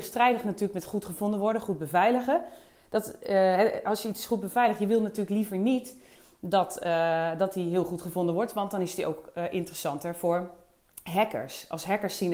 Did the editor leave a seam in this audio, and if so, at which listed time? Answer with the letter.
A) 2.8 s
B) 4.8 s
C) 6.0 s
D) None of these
D